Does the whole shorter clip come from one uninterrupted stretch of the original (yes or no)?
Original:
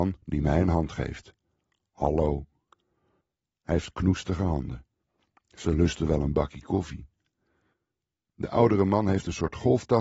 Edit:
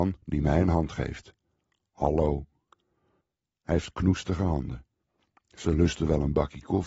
yes